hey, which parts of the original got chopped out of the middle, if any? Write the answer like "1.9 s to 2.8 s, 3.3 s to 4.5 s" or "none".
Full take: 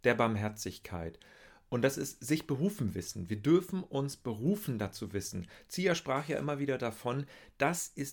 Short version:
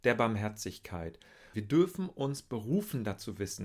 1.5 s to 3.3 s